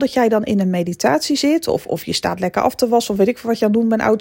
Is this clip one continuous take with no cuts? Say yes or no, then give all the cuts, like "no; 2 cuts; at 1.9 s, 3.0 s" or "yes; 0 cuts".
yes; 0 cuts